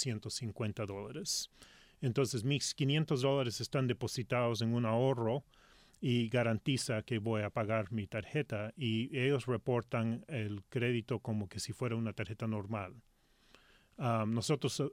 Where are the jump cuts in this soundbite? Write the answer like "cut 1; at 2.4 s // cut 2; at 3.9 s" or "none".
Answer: none